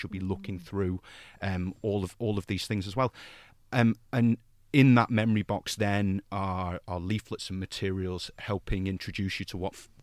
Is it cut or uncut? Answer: uncut